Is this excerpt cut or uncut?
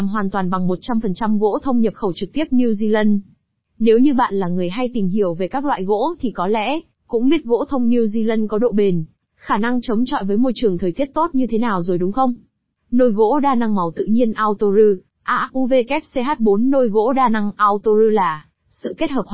cut